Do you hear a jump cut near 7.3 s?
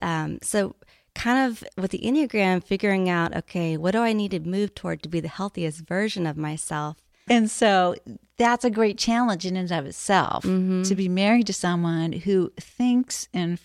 yes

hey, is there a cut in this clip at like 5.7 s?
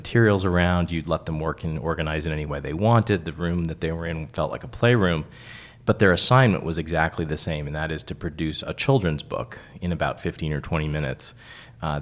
no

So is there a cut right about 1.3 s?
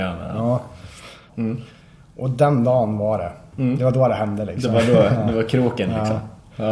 yes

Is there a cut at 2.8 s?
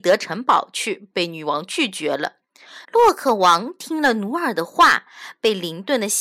yes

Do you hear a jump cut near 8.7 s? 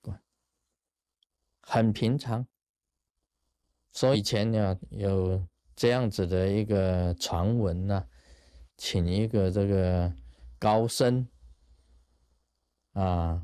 yes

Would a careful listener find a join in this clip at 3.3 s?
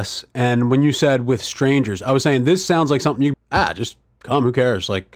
yes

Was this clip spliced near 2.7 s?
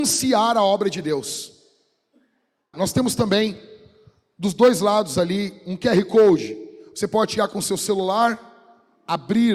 yes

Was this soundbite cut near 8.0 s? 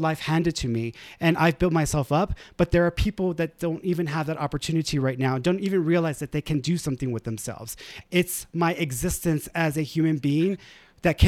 yes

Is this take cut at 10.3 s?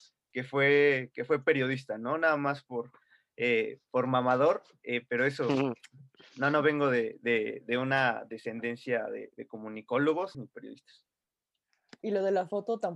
yes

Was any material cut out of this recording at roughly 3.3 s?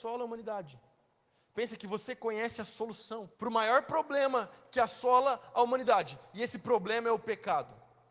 yes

